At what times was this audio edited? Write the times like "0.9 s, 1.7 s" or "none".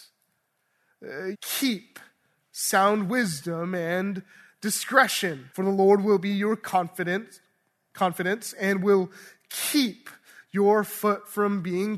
1.3 s, 5.5 s